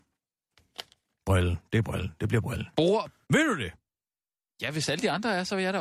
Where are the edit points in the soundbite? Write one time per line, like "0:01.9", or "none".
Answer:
0:03.2